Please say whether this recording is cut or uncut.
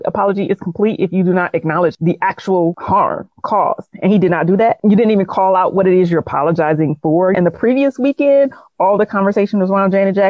cut